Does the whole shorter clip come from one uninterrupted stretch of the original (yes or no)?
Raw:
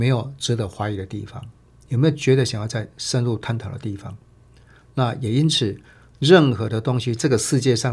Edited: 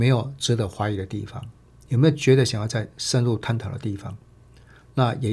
yes